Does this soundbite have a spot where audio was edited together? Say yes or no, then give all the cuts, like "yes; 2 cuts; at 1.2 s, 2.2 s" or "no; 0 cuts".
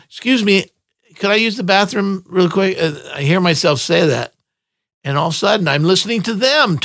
no; 0 cuts